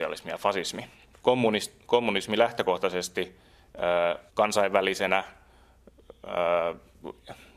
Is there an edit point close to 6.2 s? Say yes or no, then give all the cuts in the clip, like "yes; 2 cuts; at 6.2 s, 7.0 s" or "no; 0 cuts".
no; 2 cuts; at 1.1 s, 4.3 s